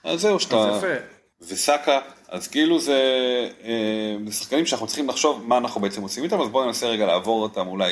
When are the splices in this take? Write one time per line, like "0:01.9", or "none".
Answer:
0:01.3